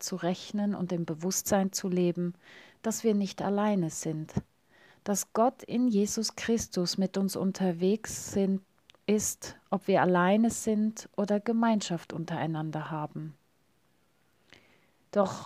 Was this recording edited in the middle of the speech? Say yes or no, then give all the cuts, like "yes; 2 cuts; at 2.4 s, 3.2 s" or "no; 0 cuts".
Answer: no; 0 cuts